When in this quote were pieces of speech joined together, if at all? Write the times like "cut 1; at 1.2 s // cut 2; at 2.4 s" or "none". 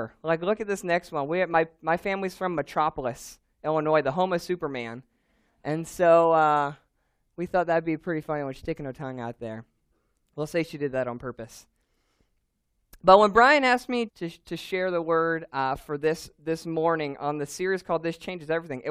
cut 1; at 14.1 s

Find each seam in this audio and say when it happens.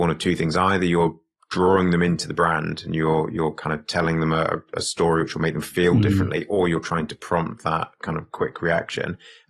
none

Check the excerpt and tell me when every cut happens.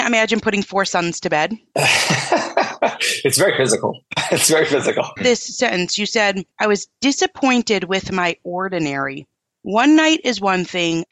cut 1; at 5.2 s // cut 2; at 6.5 s

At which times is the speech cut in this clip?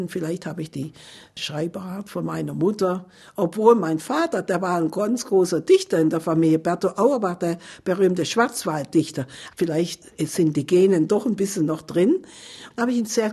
none

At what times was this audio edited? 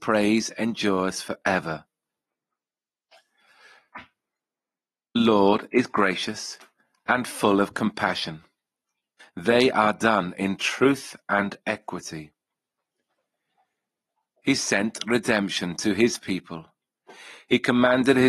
cut 1; at 9.2 s

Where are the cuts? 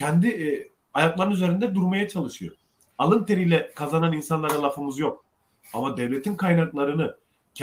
none

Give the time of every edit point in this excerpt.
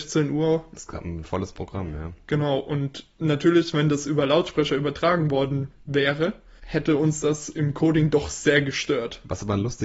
cut 1; at 6.6 s

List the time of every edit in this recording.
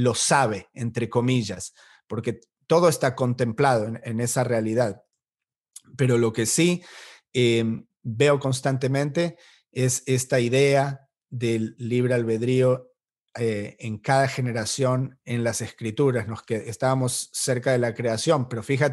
cut 1; at 11.8 s

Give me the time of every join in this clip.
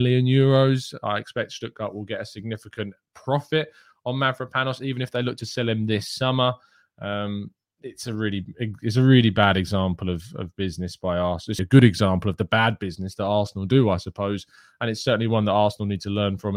cut 1; at 11.6 s

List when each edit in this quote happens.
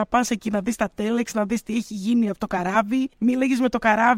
cut 1; at 3.1 s

